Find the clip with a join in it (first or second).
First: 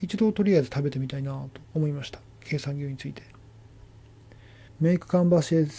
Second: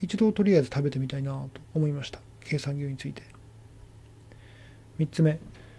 first